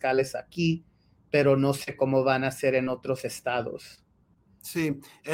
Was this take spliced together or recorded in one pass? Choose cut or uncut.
uncut